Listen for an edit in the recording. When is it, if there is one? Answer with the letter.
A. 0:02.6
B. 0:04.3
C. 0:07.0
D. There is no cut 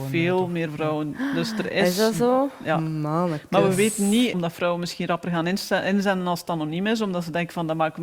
B